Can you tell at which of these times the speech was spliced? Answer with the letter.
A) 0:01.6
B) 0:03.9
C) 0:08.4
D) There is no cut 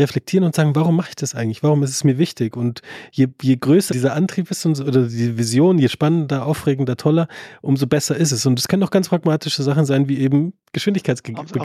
B